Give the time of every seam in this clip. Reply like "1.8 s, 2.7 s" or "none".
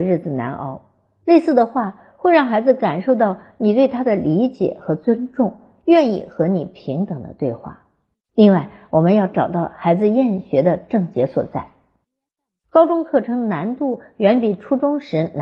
none